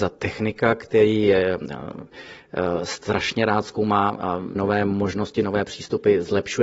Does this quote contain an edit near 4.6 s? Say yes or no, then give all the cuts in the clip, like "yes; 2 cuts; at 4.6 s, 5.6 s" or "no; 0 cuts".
yes; 1 cut; at 4.6 s